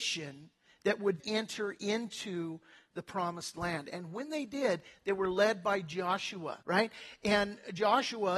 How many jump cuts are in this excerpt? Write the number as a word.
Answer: two